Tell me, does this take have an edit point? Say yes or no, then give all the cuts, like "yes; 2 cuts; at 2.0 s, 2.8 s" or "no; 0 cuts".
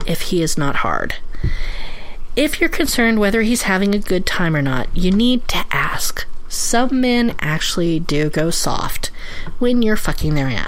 no; 0 cuts